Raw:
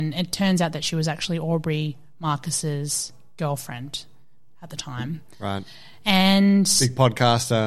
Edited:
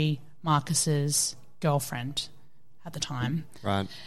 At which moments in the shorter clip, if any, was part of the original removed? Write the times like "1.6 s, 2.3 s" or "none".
none